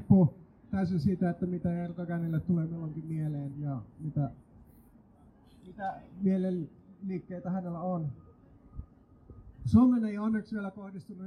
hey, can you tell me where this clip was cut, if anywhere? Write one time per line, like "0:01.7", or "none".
0:03.5